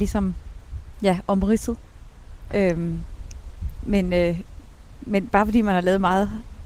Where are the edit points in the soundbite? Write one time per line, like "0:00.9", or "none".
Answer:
0:02.5